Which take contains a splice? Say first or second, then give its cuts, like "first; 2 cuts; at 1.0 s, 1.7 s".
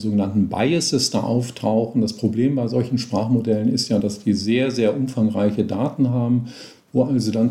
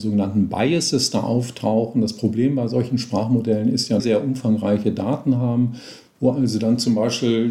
second; 1 cut; at 4.0 s